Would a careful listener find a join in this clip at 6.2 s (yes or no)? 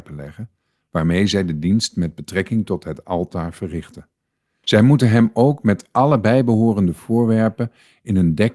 no